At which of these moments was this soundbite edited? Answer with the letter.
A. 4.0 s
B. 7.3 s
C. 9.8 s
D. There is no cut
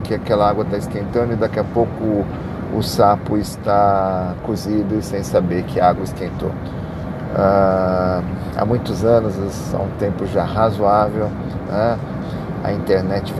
D